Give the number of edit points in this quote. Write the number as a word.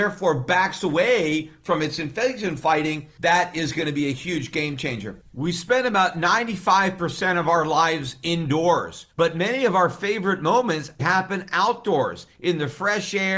two